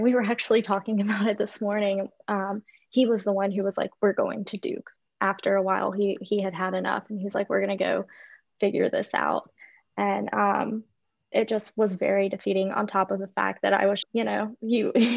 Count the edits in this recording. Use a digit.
2